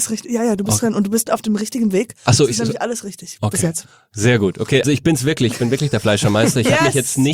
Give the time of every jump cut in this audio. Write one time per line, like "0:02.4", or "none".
0:04.8